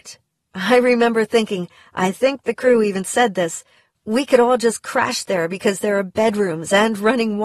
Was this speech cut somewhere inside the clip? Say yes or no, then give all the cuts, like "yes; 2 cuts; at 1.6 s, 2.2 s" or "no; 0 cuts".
no; 0 cuts